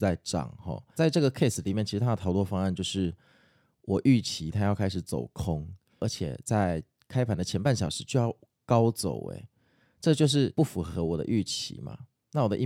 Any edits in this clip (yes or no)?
yes